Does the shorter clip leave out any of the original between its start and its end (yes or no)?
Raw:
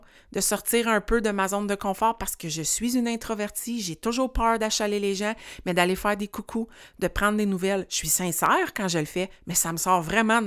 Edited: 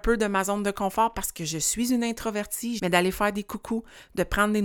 yes